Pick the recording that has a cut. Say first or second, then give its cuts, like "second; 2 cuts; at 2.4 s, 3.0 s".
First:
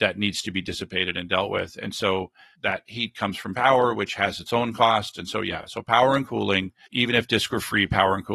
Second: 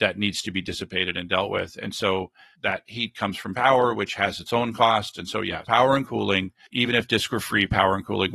second; 1 cut; at 5.6 s